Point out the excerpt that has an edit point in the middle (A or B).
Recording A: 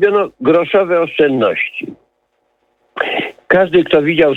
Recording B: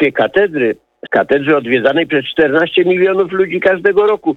B